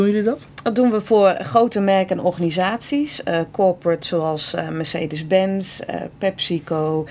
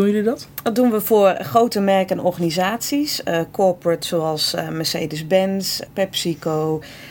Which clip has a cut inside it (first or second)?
second